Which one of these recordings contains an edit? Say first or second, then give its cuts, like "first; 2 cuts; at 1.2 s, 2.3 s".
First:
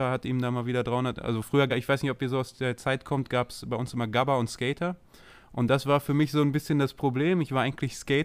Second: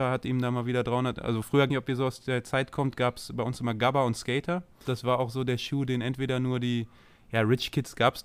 second; 2 cuts; at 1.7 s, 4.8 s